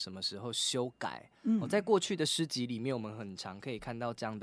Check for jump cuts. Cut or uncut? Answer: uncut